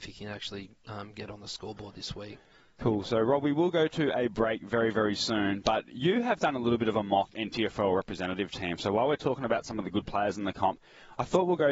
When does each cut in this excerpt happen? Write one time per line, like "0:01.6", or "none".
none